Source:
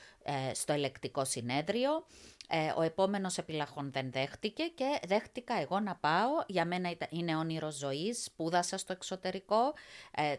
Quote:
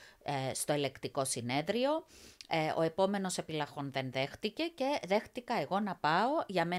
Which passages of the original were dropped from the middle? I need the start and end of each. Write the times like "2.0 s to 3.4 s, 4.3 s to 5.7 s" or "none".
none